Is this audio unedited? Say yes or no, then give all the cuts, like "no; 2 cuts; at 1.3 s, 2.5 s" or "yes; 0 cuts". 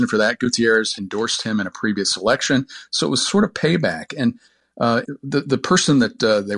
no; 1 cut; at 5.1 s